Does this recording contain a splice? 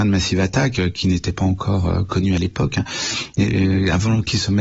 no; 0 cuts

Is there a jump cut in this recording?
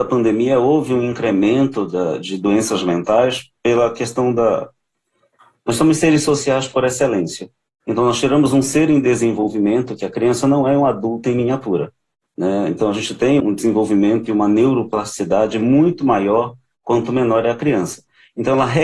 yes; 1 cut; at 13.4 s

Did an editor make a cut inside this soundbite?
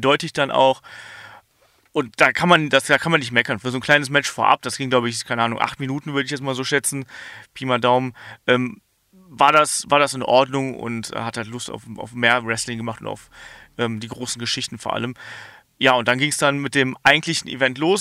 no; 0 cuts

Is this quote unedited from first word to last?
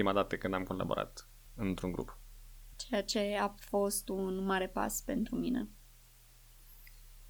no; 1 cut; at 2.7 s

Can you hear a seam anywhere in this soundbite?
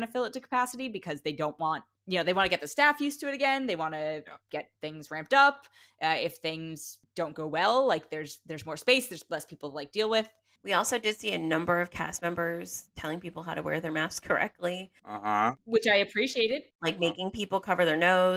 no; 0 cuts

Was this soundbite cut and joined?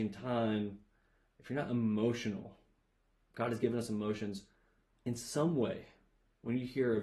no; 0 cuts

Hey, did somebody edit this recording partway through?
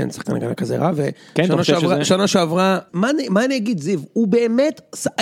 yes; 1 cut; at 2.9 s

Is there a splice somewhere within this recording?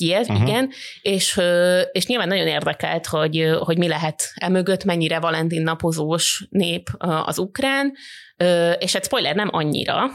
no; 0 cuts

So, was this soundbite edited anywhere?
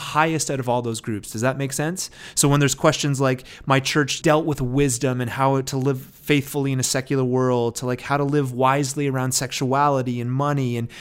yes; 1 cut; at 4.2 s

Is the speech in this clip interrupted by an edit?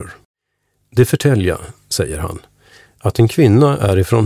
no; 0 cuts

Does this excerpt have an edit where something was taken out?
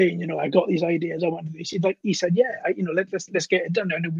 no; 0 cuts

